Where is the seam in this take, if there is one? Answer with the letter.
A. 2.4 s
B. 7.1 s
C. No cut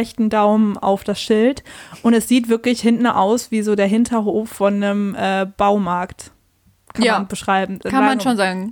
C